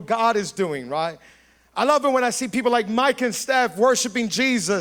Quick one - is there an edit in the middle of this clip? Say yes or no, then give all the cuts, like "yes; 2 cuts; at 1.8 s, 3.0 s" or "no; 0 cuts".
no; 0 cuts